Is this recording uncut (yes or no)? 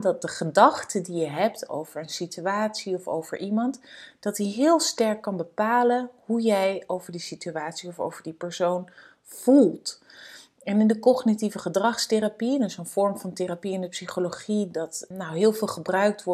no